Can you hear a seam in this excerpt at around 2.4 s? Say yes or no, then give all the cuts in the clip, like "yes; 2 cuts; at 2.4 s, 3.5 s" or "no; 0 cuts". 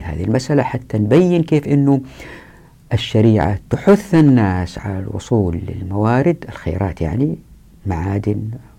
no; 0 cuts